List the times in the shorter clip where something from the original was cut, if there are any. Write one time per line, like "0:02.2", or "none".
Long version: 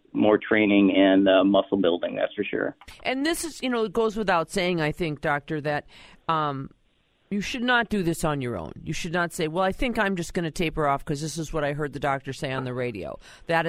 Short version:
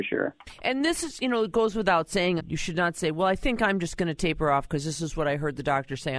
0:02.4